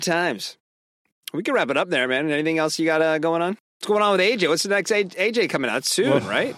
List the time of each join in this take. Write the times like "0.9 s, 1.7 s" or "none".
none